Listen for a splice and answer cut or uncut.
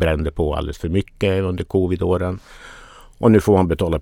uncut